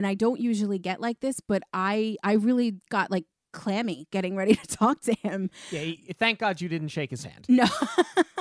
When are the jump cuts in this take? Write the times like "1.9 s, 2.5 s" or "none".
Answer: none